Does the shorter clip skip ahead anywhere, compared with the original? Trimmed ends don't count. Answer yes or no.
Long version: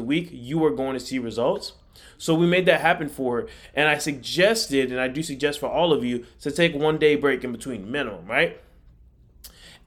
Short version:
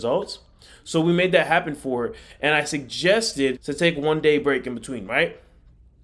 yes